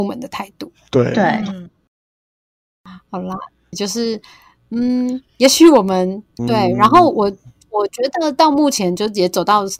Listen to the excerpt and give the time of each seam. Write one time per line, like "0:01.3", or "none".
0:03.7
0:06.4